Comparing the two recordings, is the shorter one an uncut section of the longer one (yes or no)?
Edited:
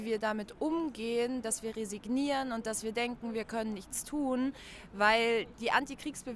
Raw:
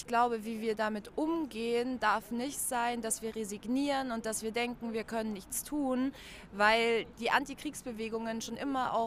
no